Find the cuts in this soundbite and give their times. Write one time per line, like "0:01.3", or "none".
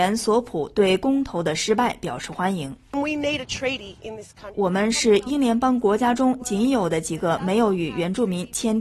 0:04.5

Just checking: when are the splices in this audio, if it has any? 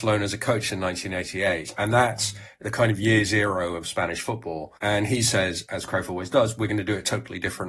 0:04.8

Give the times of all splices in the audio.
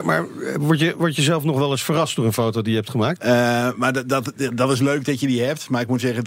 0:03.2

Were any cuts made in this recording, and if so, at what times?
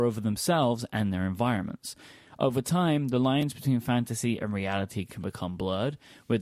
none

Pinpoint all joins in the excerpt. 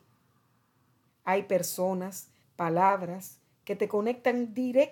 0:01.1
0:02.4

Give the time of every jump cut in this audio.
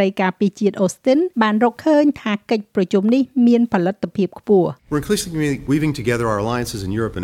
0:01.3
0:04.8

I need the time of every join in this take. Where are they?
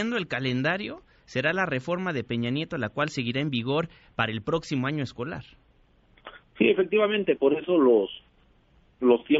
none

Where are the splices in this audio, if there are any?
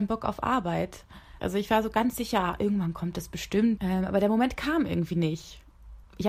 0:01.4
0:03.8

